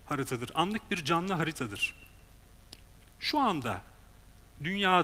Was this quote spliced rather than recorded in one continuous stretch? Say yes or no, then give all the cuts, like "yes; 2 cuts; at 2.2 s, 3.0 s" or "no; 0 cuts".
no; 0 cuts